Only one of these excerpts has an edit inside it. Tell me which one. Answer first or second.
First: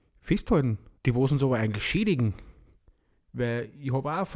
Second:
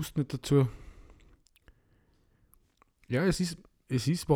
first